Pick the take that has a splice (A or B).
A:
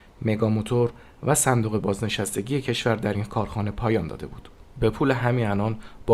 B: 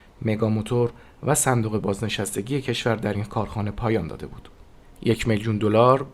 A